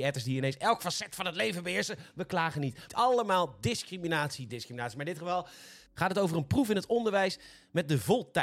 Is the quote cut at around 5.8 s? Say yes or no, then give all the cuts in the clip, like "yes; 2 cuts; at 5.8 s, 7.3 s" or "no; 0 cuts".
no; 2 cuts; at 2.9 s, 4.5 s